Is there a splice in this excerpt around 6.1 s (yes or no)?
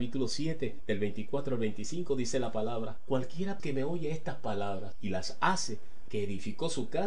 yes